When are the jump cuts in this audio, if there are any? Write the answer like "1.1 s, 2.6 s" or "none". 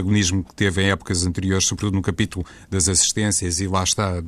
none